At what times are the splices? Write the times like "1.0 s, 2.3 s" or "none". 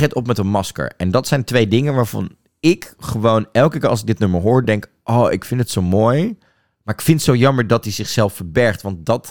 none